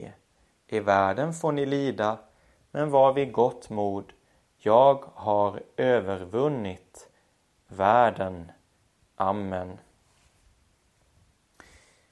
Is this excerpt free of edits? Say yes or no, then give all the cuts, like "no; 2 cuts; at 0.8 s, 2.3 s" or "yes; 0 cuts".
yes; 0 cuts